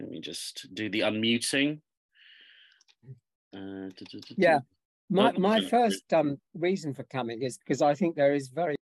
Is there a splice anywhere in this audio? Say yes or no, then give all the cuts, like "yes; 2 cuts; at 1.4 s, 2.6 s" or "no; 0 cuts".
no; 0 cuts